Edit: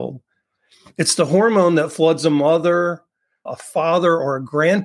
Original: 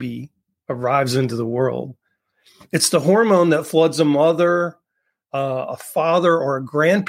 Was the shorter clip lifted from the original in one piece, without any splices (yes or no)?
no